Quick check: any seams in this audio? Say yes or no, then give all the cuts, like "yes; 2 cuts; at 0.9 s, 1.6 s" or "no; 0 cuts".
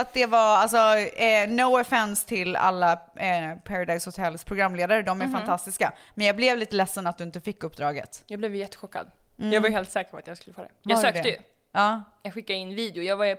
no; 0 cuts